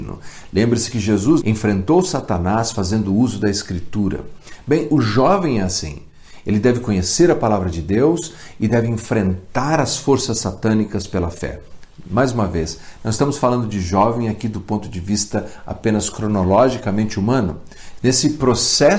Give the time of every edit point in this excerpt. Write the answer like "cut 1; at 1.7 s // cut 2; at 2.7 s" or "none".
cut 1; at 1.4 s // cut 2; at 18.0 s